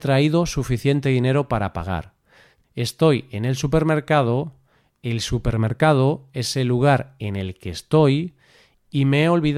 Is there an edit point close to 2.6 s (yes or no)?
yes